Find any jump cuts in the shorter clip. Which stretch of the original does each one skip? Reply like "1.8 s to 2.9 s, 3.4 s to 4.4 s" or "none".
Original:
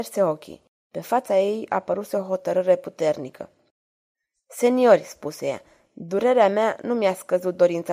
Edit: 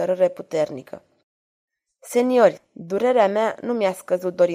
5.0 s to 5.8 s